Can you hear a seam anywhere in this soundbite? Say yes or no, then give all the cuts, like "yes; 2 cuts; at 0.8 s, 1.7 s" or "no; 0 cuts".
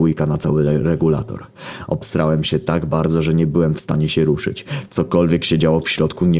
no; 0 cuts